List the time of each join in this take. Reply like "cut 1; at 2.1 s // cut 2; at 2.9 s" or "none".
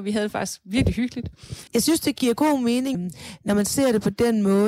cut 1; at 1.7 s // cut 2; at 2.9 s